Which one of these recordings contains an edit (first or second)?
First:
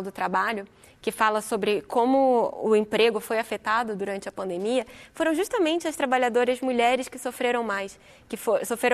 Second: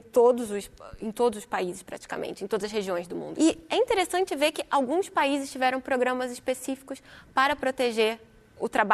second